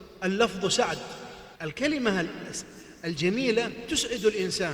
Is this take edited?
yes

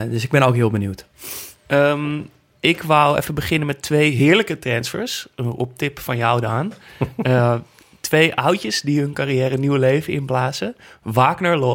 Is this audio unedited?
yes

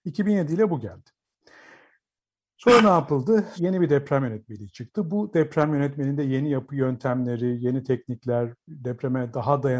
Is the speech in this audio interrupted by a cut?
yes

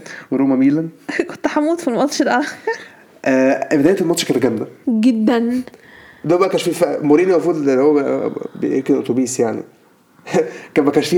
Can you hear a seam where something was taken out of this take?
yes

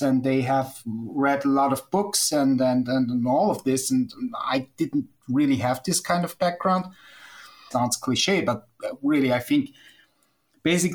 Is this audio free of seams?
no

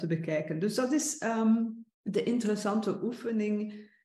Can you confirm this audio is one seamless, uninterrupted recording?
no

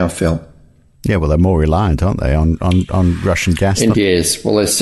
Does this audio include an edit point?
yes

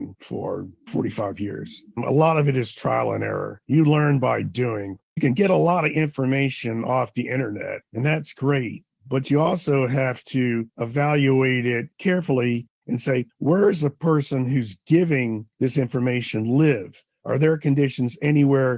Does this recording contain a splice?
no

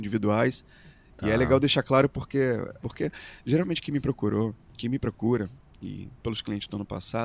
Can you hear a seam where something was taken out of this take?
yes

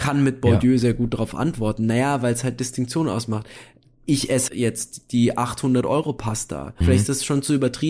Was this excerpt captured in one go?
no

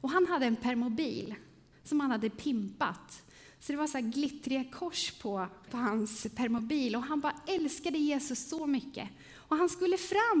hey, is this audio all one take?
no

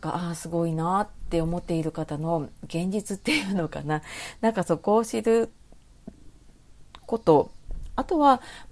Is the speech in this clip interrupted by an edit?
no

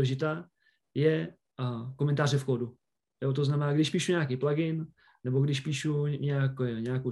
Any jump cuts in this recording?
no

